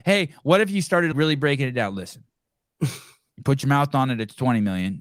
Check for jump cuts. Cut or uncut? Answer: cut